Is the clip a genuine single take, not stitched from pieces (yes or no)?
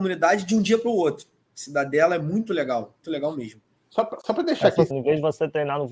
no